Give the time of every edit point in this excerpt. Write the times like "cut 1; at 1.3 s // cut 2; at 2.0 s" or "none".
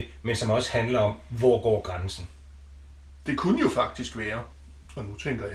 none